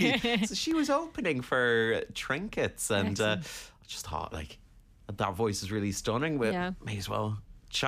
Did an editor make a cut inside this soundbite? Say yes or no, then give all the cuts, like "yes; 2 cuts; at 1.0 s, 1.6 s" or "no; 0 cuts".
no; 0 cuts